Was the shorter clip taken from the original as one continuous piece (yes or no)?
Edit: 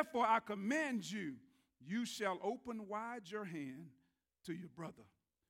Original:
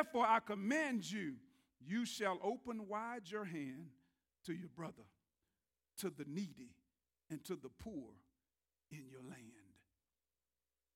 yes